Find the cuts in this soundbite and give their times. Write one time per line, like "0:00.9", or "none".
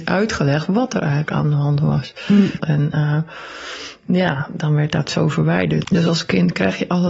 0:02.6
0:05.8